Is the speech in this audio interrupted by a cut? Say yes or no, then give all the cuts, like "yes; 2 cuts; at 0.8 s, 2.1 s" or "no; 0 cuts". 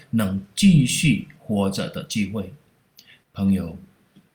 yes; 1 cut; at 3.2 s